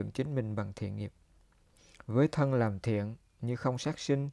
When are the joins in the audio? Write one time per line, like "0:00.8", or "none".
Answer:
none